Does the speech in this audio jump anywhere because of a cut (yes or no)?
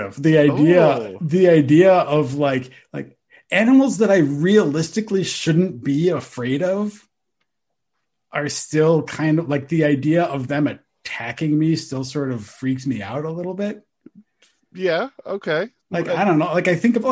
no